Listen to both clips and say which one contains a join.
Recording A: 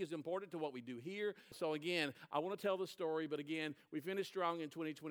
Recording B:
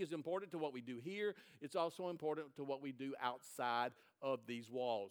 A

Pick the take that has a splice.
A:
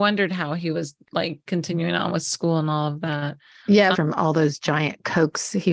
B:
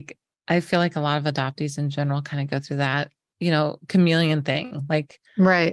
A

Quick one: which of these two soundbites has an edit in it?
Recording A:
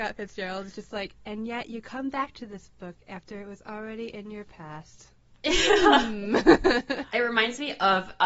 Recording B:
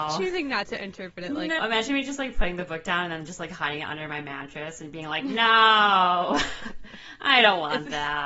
B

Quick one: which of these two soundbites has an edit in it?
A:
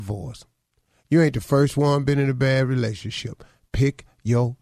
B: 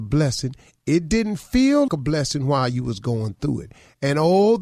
B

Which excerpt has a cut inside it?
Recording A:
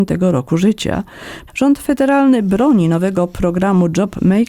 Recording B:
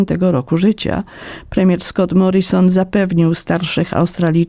A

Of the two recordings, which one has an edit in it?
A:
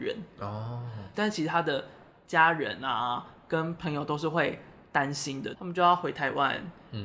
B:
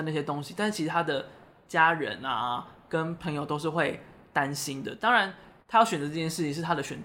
A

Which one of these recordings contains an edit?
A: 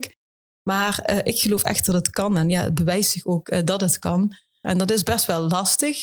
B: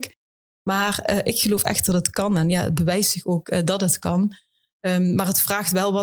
A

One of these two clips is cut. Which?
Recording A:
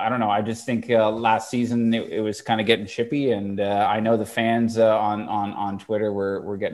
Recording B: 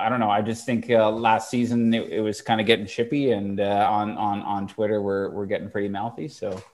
B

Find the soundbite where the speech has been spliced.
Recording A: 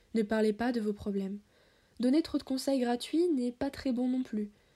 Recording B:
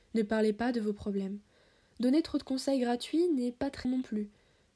B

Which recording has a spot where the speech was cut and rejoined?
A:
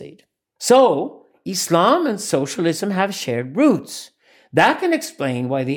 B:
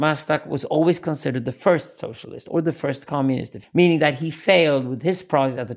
B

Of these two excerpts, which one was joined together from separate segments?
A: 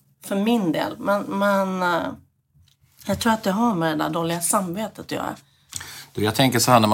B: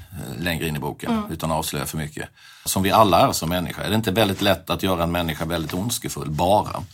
B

